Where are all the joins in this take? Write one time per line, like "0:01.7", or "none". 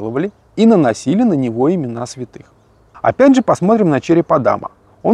none